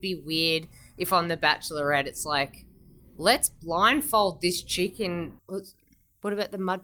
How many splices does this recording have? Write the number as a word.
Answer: one